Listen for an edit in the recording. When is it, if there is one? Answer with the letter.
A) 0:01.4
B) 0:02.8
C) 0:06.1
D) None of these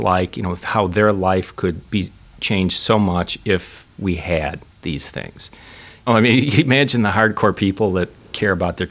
C